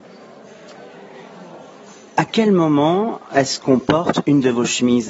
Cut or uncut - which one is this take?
uncut